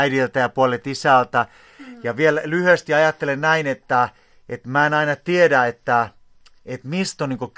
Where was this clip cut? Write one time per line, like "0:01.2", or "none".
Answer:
0:01.8